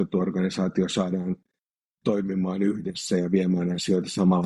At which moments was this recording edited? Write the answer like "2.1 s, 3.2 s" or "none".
none